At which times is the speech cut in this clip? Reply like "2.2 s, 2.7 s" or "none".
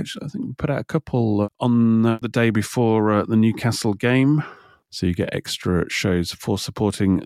none